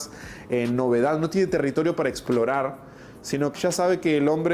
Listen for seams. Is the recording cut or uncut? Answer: cut